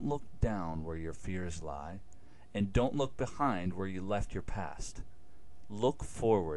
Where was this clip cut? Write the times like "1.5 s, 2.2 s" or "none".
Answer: none